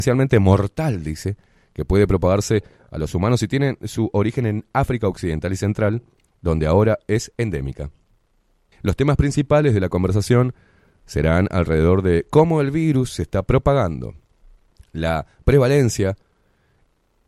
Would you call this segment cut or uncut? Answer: cut